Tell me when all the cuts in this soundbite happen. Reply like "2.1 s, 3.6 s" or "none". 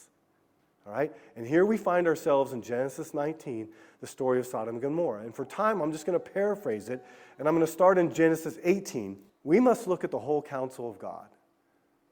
9.3 s